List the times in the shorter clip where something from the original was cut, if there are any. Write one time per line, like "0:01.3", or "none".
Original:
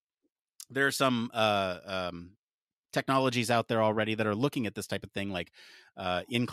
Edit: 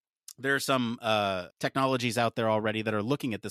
0:01.5